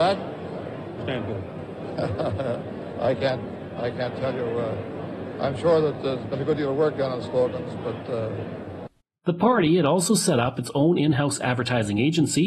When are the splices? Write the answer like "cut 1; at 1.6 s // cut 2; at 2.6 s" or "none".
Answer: cut 1; at 1.0 s